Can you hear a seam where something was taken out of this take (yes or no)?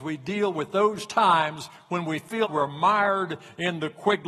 yes